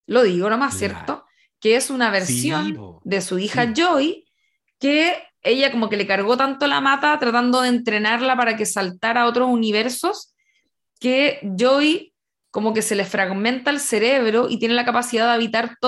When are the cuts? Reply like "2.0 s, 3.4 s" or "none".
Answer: 5.4 s